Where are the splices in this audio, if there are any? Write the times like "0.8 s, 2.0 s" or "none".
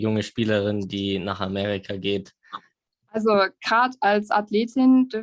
2.9 s